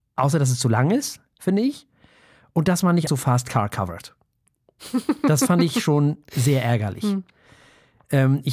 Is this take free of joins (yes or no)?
no